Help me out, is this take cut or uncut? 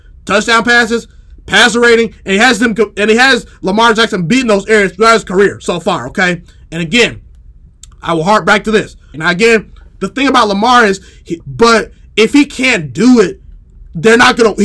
cut